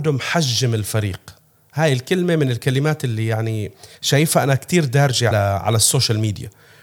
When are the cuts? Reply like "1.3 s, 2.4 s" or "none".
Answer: 3.9 s, 5.3 s